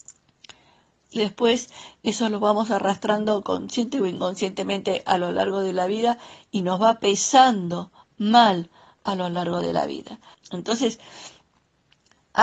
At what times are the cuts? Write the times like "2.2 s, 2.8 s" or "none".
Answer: 1.2 s, 10.3 s

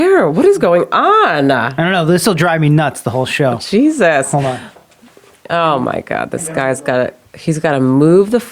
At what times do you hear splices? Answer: none

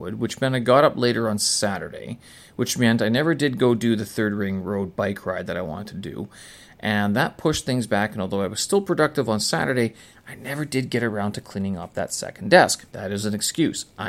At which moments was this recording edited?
12.9 s

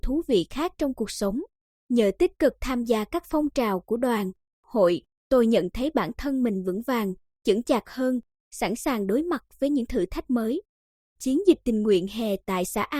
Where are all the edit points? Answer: 1.7 s

